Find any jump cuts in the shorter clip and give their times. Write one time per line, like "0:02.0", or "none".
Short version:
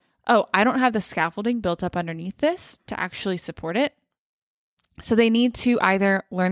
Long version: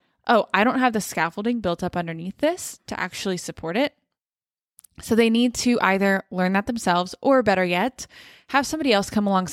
none